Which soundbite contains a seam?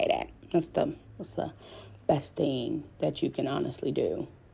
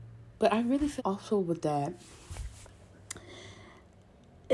second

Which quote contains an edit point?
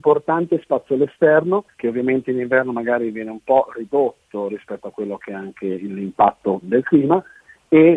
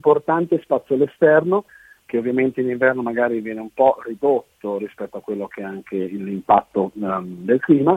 first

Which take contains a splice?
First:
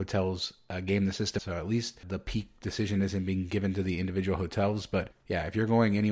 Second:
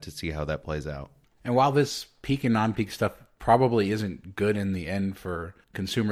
first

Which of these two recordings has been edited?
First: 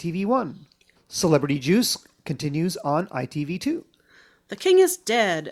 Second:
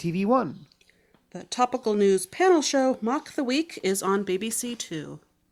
first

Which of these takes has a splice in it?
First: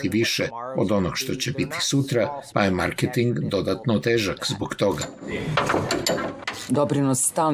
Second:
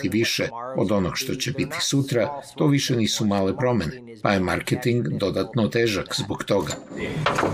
first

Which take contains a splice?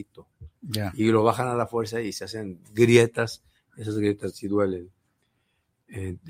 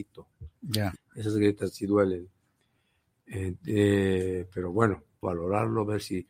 second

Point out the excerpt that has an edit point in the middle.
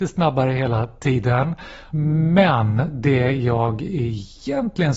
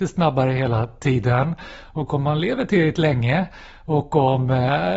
first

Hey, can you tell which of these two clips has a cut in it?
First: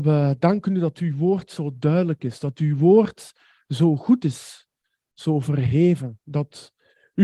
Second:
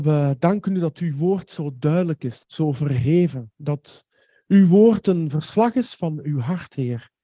second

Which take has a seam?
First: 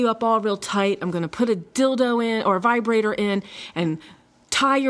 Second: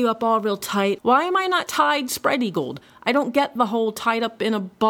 second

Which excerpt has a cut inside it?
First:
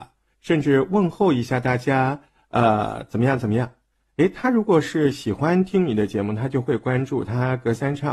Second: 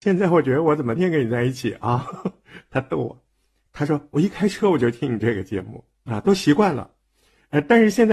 second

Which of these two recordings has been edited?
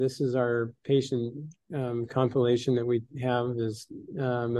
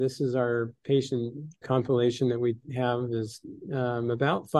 second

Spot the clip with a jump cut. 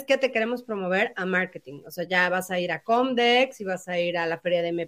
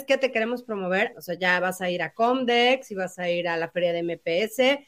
second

